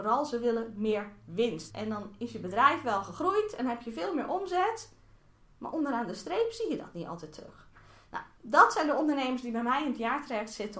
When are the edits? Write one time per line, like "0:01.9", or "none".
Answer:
0:01.7